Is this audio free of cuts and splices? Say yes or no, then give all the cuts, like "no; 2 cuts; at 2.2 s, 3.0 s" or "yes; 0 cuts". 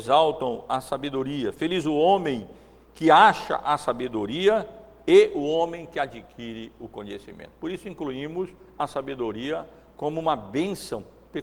yes; 0 cuts